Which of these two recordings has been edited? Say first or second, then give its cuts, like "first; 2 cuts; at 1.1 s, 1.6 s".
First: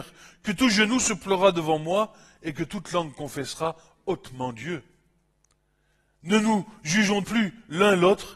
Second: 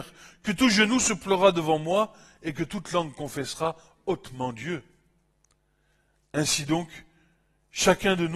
first; 2 cuts; at 6.2 s, 7.2 s